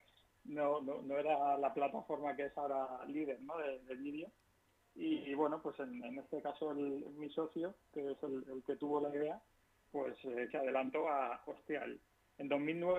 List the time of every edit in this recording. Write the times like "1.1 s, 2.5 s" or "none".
10.5 s